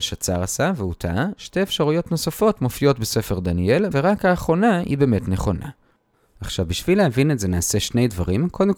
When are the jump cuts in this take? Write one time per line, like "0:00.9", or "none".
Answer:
0:01.4
0:03.9